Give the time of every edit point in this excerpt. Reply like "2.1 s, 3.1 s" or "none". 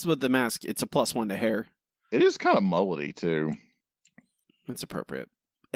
none

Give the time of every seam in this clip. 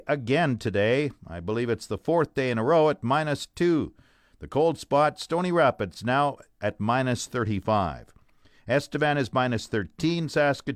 none

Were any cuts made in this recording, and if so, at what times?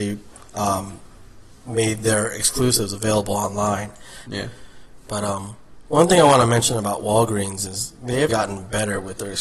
4.3 s, 8.3 s

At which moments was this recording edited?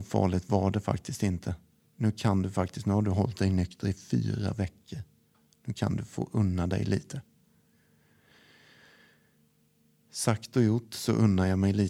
1.8 s

